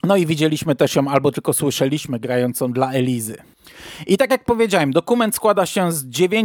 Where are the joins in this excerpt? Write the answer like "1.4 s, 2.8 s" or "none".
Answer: none